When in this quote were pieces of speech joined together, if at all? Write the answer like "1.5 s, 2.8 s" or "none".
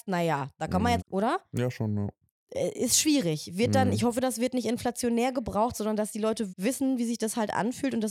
1.0 s, 6.5 s